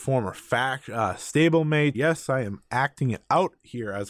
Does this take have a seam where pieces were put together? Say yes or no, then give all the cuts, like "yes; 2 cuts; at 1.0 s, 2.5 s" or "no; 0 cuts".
yes; 1 cut; at 1.9 s